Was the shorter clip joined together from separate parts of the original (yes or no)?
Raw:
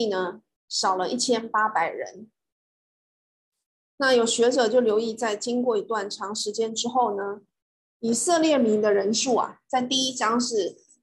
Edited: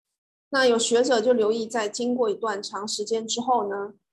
no